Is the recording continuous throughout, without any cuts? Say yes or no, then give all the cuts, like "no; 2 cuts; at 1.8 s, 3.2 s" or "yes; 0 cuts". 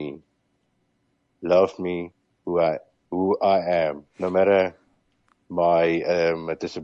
no; 1 cut; at 4.1 s